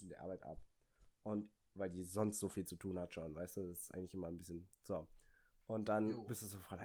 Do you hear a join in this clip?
no; 0 cuts

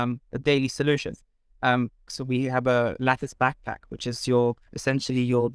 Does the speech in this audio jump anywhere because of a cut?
yes; 1 cut; at 2.1 s

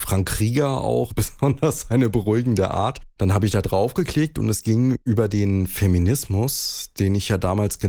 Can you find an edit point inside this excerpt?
yes; 2 cuts; at 1.1 s, 3.2 s

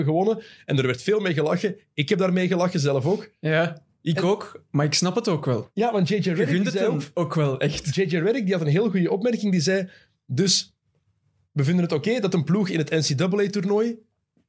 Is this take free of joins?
yes; 0 cuts

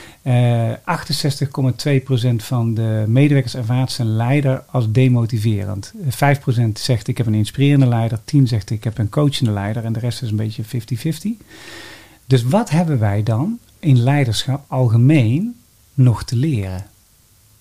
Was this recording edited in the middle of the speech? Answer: no; 0 cuts

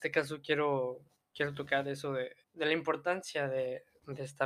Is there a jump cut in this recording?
yes; 1 cut; at 2.4 s

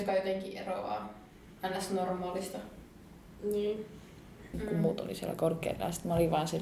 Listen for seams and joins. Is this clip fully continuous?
no; 1 cut; at 4.5 s

